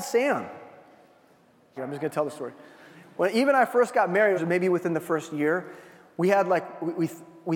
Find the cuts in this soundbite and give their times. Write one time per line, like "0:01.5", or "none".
0:01.8
0:04.4